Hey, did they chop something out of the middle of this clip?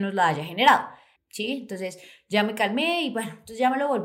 yes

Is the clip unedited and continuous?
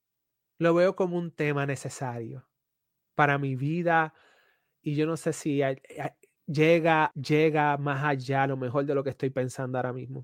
no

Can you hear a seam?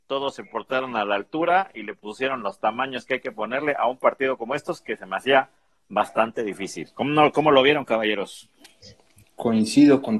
no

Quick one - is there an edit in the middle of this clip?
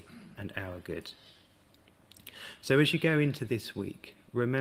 no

